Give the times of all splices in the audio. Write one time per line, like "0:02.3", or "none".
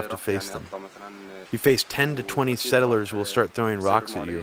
0:01.5